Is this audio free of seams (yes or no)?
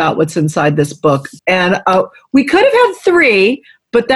no